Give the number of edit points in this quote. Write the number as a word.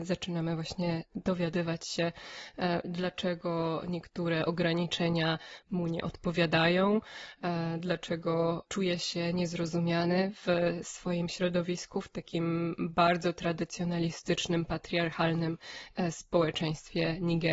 one